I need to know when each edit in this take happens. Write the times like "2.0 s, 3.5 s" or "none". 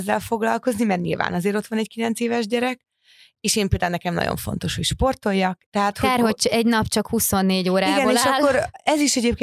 5.7 s